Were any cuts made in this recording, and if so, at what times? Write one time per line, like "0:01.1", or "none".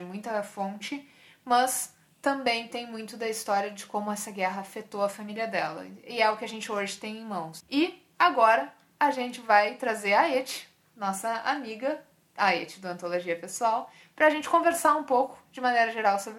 0:07.6

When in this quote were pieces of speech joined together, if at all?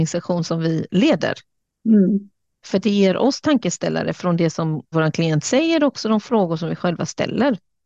0:04.9

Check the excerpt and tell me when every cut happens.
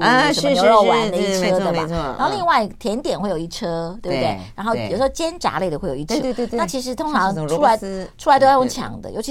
0:06.2

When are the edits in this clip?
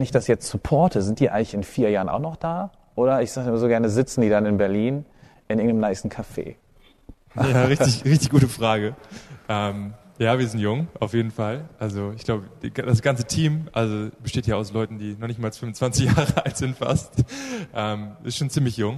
none

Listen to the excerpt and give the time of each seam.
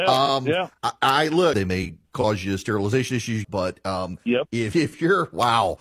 0:01.5
0:03.4
0:04.7

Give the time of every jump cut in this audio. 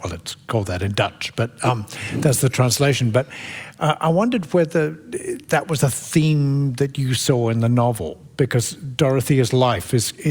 none

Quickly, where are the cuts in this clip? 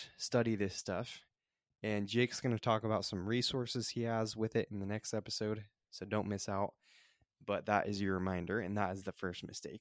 none

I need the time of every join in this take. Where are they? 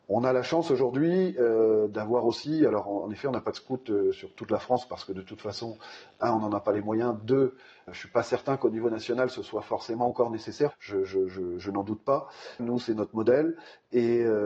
0:07.9
0:10.7
0:12.6

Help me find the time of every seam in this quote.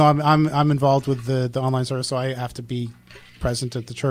none

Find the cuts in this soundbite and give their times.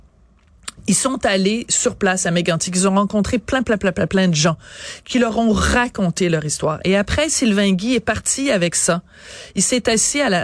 none

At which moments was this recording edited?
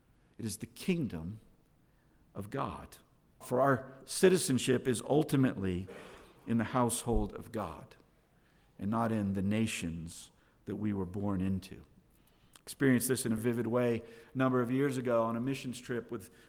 0:03.4
0:13.4

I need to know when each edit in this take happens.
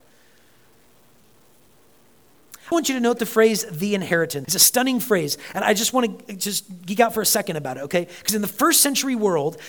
0:02.7
0:04.4

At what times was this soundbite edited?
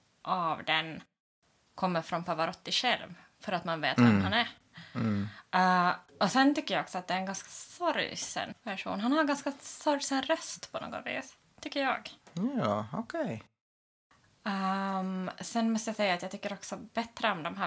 none

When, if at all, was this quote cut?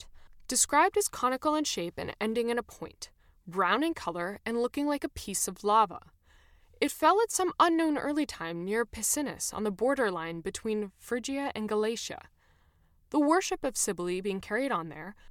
none

